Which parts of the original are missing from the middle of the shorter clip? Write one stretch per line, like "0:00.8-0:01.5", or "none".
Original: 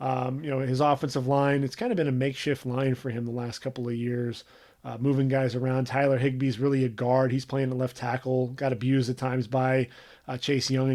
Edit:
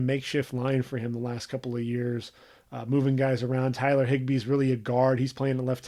none